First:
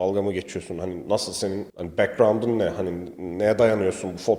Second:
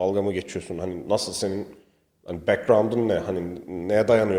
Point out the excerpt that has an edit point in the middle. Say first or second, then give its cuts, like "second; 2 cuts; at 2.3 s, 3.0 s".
first; 1 cut; at 1.7 s